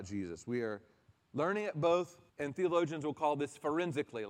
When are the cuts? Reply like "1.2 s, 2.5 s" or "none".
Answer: 2.3 s